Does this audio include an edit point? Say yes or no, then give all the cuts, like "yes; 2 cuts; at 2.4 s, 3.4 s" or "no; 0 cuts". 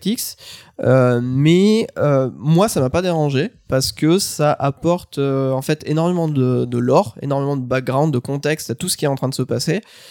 no; 0 cuts